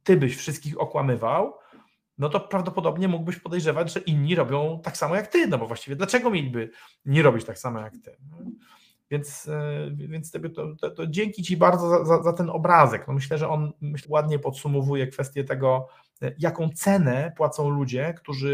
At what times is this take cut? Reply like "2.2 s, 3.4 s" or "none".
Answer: 12.2 s, 14.0 s